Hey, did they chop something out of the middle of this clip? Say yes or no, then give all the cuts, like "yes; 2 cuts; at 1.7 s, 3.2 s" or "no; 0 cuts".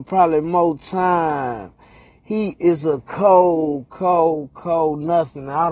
yes; 1 cut; at 3.9 s